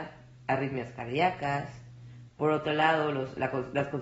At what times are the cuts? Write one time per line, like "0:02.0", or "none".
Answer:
0:02.3